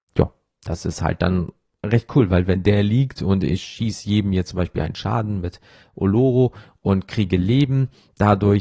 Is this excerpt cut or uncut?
uncut